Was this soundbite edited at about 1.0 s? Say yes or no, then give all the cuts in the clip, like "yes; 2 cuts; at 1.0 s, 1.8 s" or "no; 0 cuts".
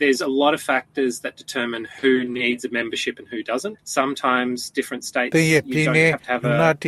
no; 1 cut; at 3.8 s